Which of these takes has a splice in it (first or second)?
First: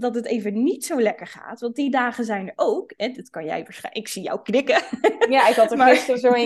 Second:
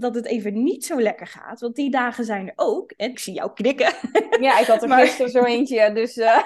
second